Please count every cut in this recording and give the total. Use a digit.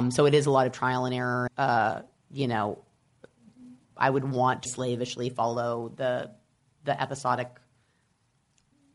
2